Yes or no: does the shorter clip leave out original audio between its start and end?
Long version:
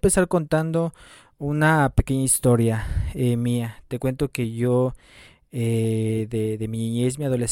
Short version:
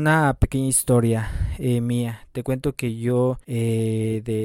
yes